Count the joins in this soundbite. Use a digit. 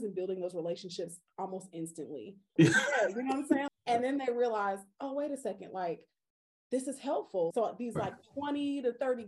3